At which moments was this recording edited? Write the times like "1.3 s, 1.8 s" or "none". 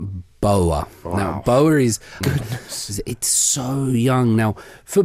2.2 s